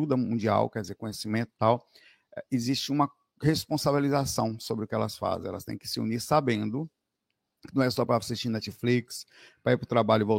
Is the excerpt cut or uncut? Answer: uncut